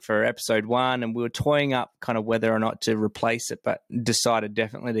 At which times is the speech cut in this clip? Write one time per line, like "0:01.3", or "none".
none